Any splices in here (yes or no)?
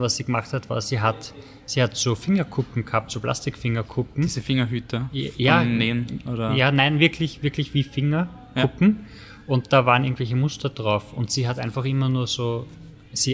no